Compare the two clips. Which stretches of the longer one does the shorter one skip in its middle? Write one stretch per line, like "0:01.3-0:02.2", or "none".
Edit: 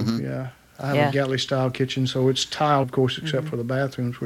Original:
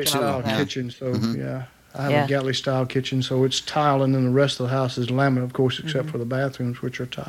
0:04.0-0:05.4